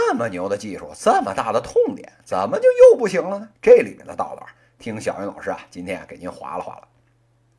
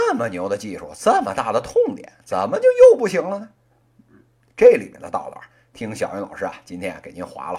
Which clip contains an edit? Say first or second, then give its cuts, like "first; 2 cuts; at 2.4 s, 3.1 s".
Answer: first; 1 cut; at 3.6 s